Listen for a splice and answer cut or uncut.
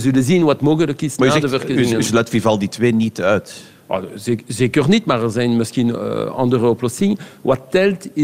uncut